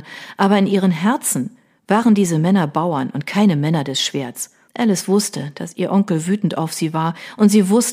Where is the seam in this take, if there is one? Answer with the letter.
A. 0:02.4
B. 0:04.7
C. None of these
B